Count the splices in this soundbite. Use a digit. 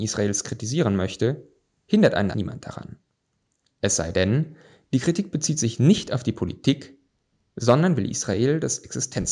1